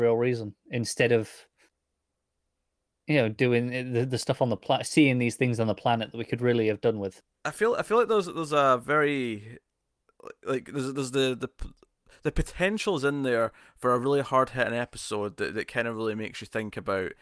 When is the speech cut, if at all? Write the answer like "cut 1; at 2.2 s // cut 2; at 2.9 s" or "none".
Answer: none